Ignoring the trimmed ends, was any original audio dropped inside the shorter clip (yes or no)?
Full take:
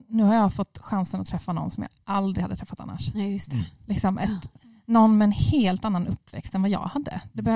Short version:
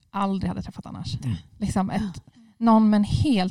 yes